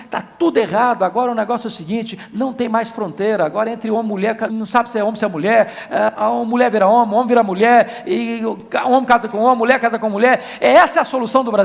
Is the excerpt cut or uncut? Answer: cut